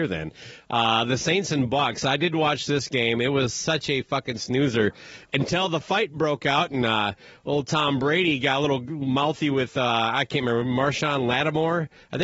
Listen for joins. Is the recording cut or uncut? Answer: uncut